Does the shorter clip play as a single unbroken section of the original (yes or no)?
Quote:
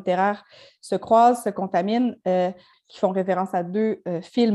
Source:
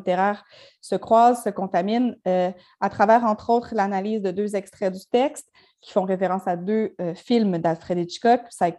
no